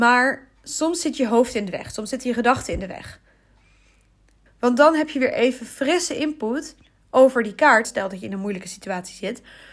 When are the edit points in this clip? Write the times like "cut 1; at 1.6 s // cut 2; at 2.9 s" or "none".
cut 1; at 4.5 s // cut 2; at 7.8 s